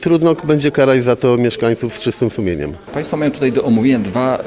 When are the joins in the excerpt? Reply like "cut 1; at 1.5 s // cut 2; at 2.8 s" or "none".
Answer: none